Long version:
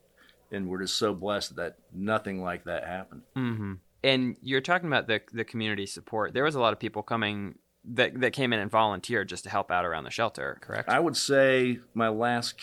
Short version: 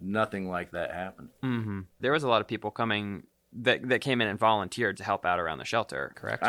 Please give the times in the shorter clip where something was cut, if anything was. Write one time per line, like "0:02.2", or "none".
0:02.0
0:05.0